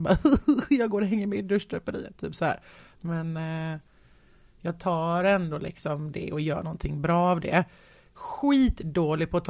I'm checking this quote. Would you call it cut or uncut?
uncut